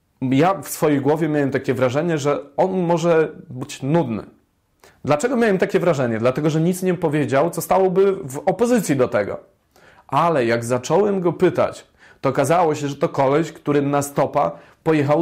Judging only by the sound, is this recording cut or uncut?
cut